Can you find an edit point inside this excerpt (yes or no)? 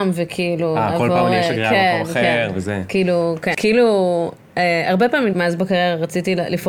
yes